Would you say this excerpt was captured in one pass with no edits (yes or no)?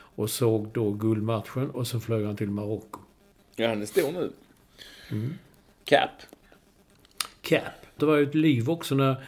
no